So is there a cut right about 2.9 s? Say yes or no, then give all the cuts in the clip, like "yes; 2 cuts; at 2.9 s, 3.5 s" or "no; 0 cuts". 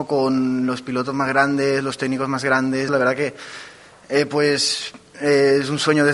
yes; 1 cut; at 2.9 s